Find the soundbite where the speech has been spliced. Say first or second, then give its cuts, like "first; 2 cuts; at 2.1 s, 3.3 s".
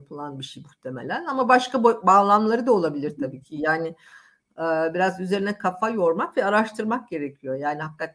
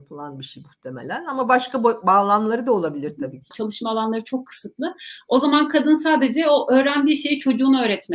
second; 1 cut; at 3.5 s